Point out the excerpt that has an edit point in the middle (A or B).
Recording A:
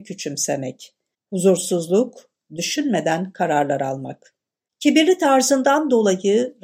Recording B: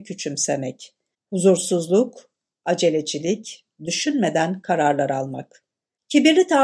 A